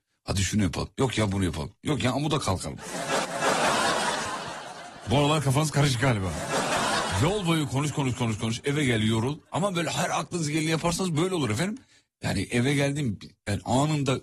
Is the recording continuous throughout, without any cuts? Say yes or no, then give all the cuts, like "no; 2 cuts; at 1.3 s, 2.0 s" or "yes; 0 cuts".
no; 1 cut; at 3.2 s